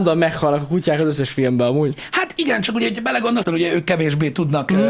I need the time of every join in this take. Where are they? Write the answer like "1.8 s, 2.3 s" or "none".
3.4 s